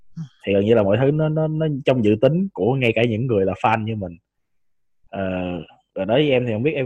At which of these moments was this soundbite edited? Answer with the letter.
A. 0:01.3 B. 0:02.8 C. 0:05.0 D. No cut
C